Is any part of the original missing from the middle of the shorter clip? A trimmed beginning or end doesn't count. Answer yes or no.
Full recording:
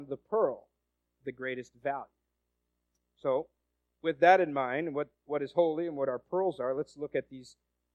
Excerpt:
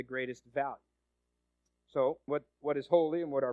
yes